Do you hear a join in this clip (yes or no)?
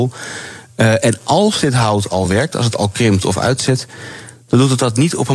no